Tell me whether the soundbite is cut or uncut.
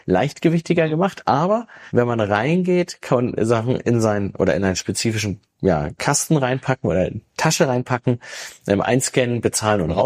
uncut